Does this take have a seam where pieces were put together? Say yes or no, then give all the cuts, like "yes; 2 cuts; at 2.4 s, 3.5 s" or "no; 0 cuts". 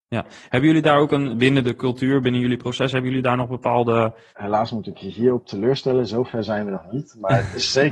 yes; 2 cuts; at 1.3 s, 4.3 s